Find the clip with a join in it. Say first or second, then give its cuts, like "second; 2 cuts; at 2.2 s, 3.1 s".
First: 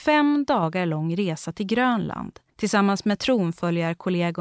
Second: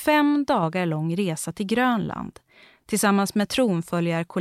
first; 1 cut; at 2.5 s